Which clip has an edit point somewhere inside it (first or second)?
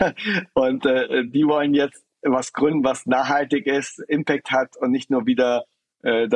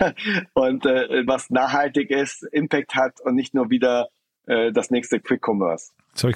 second